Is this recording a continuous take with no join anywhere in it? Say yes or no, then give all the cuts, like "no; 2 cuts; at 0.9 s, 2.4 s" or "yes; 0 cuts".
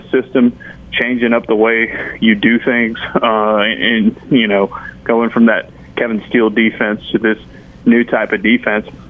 yes; 0 cuts